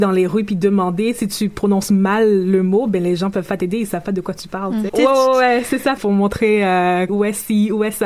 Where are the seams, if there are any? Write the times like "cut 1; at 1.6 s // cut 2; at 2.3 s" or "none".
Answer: cut 1; at 4.9 s // cut 2; at 6.0 s // cut 3; at 7.1 s